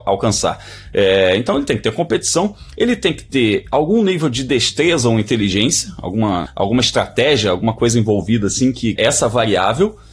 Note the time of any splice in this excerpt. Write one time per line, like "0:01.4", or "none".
0:06.4
0:09.0